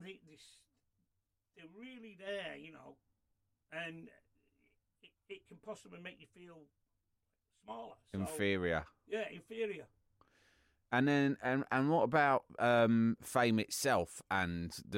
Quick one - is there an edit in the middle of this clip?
no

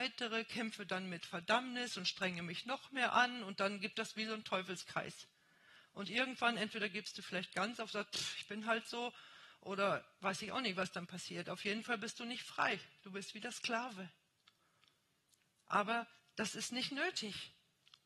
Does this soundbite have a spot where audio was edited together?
no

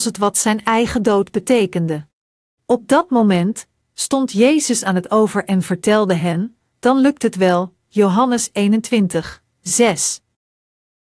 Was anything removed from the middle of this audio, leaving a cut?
yes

